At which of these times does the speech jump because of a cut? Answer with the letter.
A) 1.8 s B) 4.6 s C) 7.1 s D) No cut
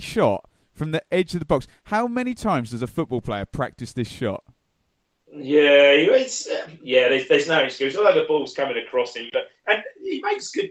D